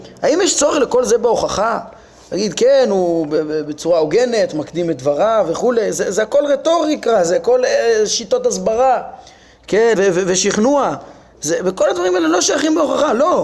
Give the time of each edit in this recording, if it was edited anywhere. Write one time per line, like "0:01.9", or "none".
0:10.0